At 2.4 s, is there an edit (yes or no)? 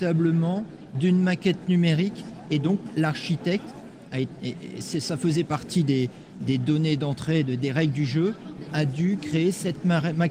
no